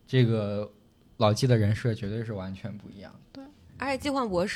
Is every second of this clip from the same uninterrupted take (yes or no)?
yes